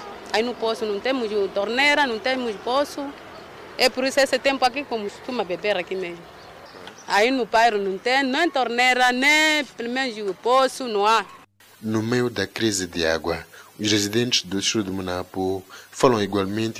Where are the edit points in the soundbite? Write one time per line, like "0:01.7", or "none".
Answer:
none